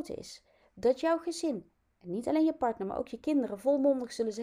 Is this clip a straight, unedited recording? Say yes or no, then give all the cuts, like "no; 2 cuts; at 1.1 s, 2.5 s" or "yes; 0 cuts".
yes; 0 cuts